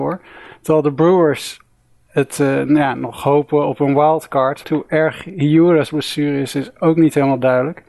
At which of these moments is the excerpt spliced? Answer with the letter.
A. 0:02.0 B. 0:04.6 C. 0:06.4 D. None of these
B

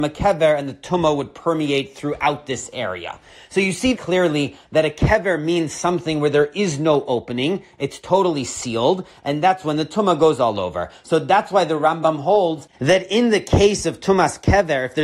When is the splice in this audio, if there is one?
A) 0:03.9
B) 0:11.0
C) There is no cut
A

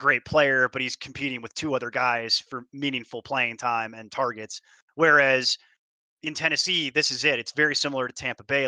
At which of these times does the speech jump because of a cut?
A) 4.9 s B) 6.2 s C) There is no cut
C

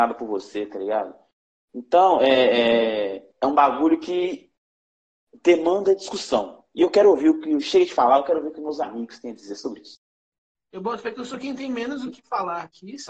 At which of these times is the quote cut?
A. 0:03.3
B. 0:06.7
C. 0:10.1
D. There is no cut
A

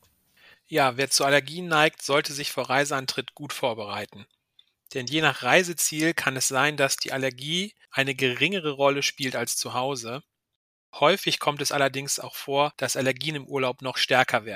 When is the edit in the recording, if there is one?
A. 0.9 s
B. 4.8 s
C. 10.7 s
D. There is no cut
D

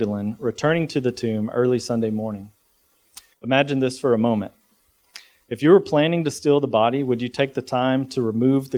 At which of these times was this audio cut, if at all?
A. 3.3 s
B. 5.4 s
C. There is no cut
A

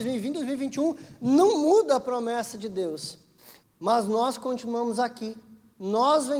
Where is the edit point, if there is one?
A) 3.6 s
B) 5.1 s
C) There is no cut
A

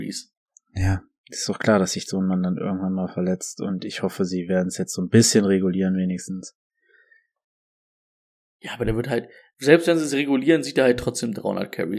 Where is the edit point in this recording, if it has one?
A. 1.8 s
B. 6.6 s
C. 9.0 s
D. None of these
D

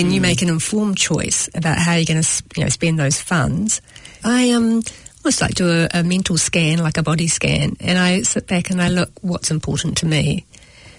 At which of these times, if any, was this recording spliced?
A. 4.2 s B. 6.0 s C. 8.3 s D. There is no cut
A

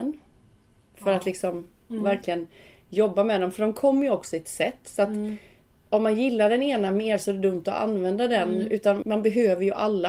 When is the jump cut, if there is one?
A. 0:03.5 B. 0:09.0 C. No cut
B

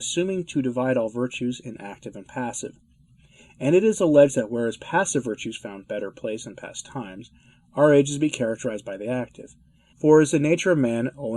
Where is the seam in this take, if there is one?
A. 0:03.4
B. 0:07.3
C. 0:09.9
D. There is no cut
C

